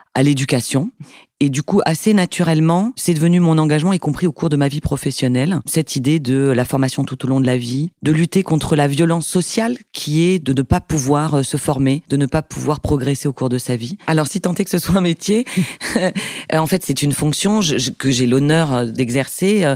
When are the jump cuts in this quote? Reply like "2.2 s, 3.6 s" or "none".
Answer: 14.0 s